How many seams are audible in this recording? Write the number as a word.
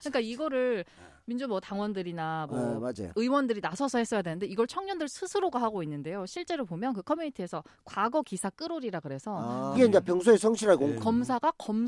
two